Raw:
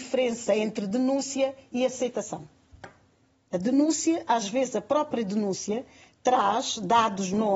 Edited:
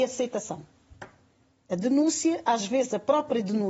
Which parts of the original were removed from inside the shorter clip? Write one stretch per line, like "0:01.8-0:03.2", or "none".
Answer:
none